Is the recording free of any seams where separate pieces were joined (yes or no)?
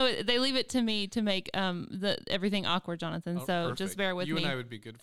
yes